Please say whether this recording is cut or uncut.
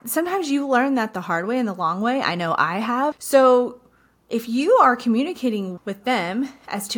cut